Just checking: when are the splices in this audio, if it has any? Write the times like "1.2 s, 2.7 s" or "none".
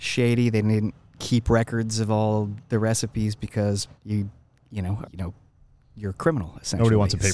4.0 s, 5.0 s

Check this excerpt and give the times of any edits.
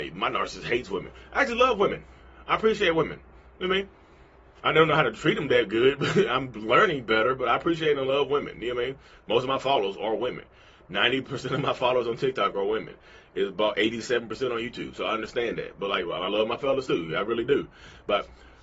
none

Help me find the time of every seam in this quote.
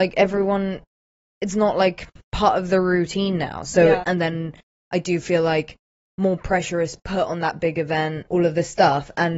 4.0 s, 8.3 s

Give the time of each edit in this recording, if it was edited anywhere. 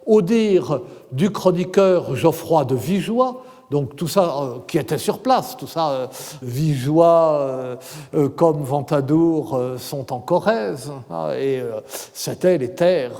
6.4 s

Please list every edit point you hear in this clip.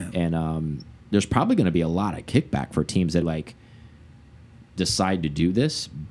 1.0 s, 3.2 s

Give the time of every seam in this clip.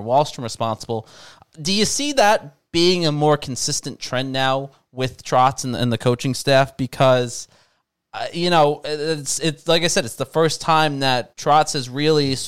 11.3 s

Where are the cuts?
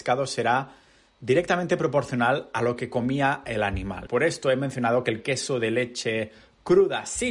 4.1 s

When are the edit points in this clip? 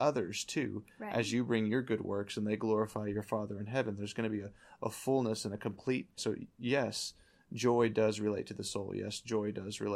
6.2 s

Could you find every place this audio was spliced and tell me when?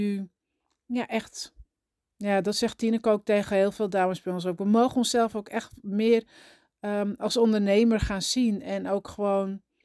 none

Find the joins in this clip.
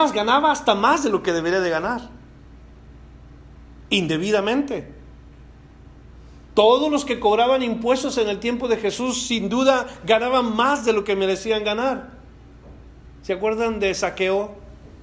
none

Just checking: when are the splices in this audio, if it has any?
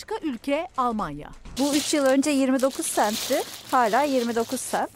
1.6 s

